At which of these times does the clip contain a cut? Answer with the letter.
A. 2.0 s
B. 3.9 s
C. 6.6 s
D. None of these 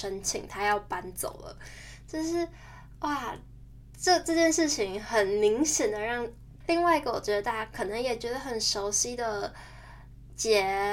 C